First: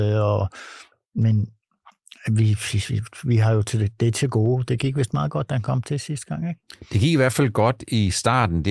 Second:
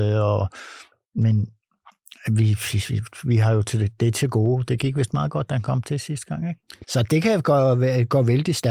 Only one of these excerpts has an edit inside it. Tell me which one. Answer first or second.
second